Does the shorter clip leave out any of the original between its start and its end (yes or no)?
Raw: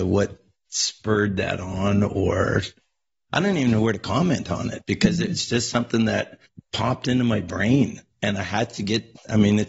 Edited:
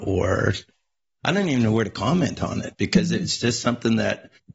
no